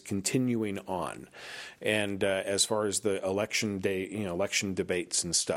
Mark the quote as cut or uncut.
uncut